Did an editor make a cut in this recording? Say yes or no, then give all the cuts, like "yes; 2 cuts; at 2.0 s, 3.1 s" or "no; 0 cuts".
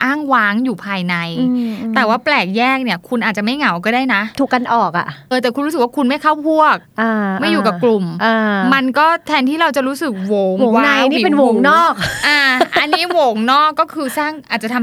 yes; 1 cut; at 5.3 s